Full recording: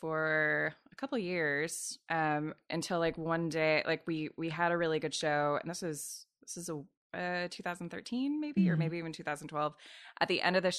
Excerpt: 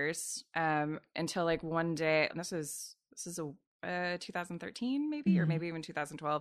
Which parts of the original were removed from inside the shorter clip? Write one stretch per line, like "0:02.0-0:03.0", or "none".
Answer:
0:03.8-0:05.6